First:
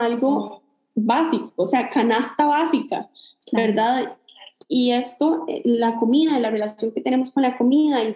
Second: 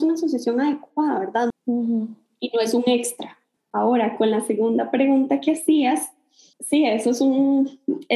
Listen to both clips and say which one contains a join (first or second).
second